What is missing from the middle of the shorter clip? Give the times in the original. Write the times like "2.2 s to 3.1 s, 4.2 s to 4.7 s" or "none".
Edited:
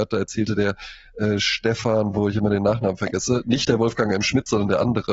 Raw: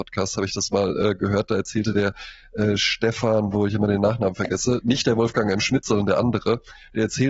none